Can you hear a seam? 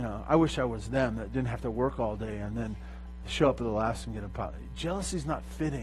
no; 0 cuts

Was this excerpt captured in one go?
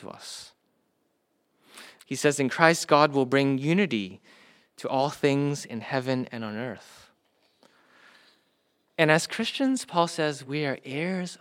no; 2 cuts; at 2.0 s, 10.4 s

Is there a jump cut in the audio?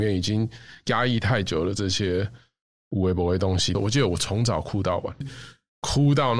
yes; 2 cuts; at 3.7 s, 5.2 s

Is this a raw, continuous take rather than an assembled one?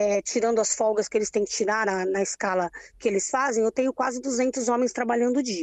yes; 0 cuts

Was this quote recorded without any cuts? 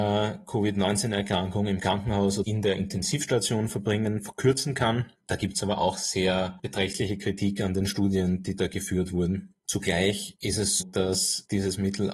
no; 1 cut; at 10.8 s

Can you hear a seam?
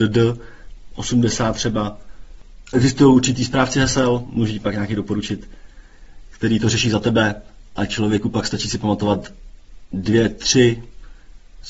yes; 1 cut; at 2.7 s

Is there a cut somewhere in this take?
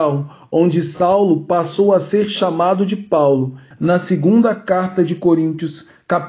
yes; 1 cut; at 3.7 s

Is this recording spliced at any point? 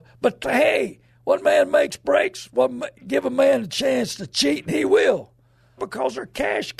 yes; 1 cut; at 5.8 s

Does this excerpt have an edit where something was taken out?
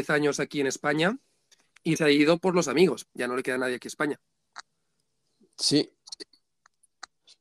yes; 2 cuts; at 2.0 s, 3.0 s

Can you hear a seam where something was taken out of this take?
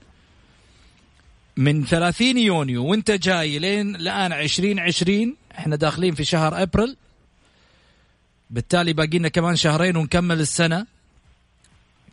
no; 0 cuts

